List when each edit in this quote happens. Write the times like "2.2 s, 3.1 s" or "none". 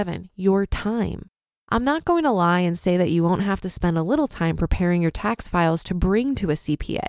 1.6 s